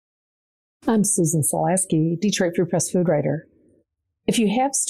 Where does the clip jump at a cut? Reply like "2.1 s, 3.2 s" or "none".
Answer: none